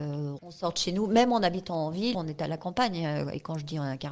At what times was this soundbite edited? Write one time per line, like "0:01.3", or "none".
0:02.1